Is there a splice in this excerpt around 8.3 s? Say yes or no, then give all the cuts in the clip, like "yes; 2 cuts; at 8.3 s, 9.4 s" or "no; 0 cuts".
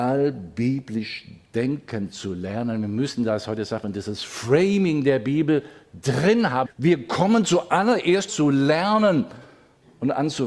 yes; 2 cuts; at 6.7 s, 8.3 s